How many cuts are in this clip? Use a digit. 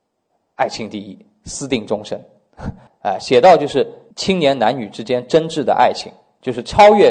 2